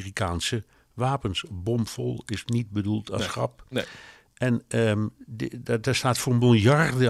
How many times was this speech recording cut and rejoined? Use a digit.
0